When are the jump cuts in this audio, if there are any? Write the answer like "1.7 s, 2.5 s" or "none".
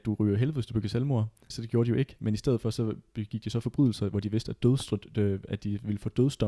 1.5 s